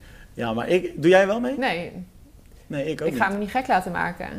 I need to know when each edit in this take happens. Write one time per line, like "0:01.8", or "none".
none